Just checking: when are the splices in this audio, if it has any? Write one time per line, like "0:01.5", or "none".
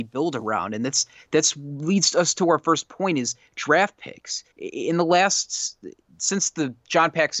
0:04.5